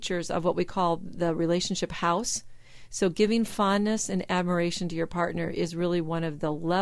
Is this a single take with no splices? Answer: yes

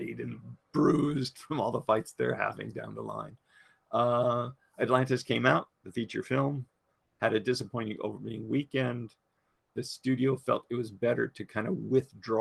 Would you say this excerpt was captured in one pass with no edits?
yes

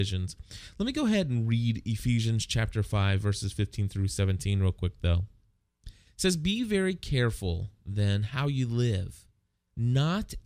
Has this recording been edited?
no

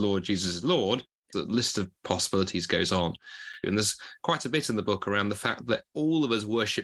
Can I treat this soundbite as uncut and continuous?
no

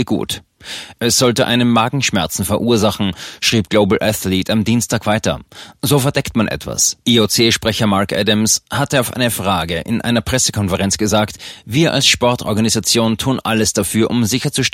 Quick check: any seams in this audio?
yes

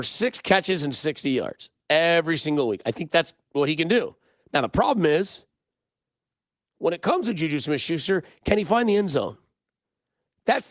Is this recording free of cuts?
yes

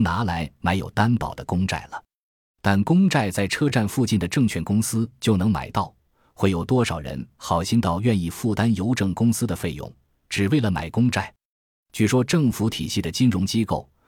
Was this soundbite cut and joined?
no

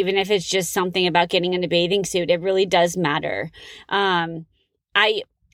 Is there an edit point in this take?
no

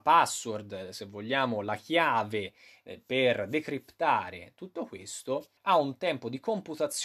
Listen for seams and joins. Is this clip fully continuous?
no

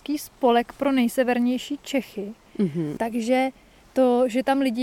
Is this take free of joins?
no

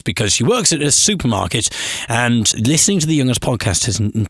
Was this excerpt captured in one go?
no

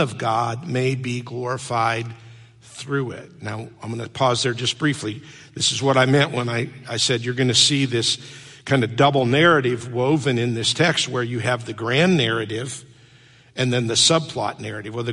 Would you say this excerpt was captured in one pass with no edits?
yes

